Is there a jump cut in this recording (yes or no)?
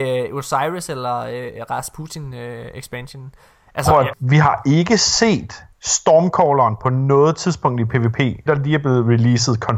yes